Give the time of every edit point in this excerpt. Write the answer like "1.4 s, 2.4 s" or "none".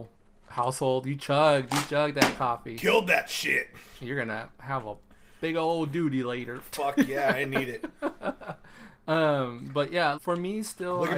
9.0 s, 10.1 s